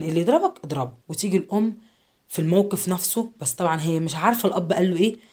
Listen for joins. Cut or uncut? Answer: cut